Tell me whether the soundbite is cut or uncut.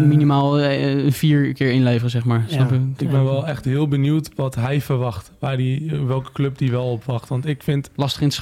uncut